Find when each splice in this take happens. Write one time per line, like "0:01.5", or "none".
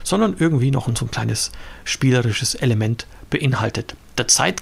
none